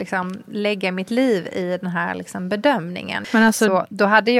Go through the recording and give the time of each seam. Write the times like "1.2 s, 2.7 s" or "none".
3.2 s